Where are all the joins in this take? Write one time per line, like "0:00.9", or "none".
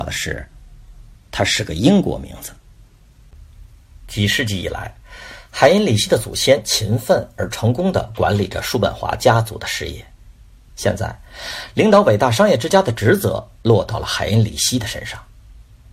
0:10.7